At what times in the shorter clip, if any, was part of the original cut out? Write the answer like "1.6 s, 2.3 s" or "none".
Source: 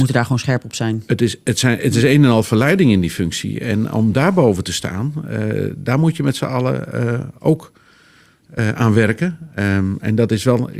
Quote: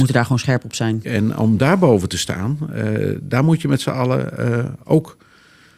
1.0 s